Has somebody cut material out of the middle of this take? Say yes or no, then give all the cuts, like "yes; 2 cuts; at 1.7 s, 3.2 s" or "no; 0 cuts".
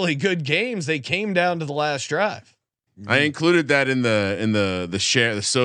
yes; 1 cut; at 2.9 s